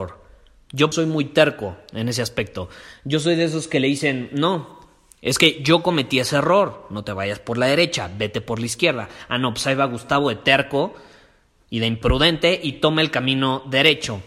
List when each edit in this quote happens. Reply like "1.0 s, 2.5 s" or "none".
0.9 s